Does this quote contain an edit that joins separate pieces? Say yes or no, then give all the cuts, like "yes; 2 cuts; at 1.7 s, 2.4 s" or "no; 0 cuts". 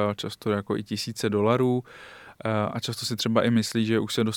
no; 0 cuts